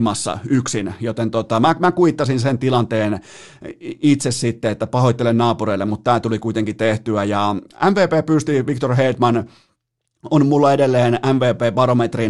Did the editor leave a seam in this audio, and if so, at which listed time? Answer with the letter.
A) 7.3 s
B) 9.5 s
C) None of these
C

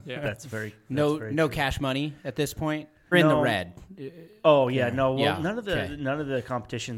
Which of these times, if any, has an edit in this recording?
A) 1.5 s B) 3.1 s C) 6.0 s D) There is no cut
B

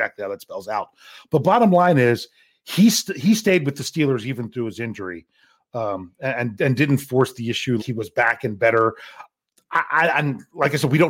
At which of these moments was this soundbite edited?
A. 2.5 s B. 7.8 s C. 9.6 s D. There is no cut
B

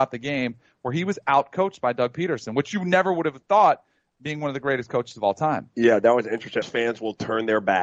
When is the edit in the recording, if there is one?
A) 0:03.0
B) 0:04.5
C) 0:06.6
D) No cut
C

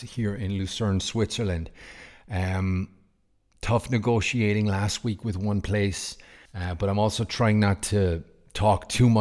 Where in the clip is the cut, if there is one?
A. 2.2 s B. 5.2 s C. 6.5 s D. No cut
C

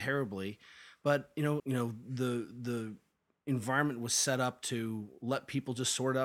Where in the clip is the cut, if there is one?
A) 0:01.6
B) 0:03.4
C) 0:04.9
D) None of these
A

